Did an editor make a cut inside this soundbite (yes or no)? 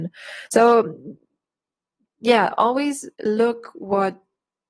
yes